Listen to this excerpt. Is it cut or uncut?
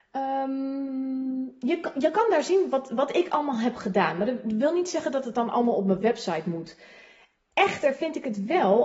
uncut